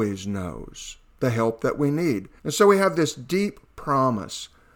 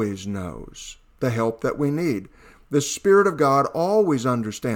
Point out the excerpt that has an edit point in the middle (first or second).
first